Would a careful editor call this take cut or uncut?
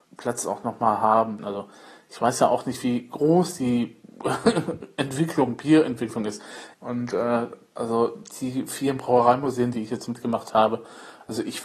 cut